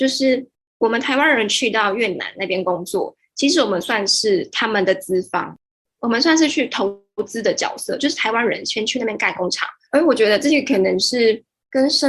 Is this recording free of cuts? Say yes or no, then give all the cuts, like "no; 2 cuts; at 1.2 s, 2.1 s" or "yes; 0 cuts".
no; 1 cut; at 9.9 s